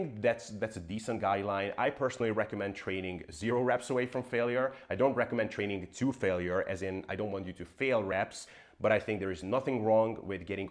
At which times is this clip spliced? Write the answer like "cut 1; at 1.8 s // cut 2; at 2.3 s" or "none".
none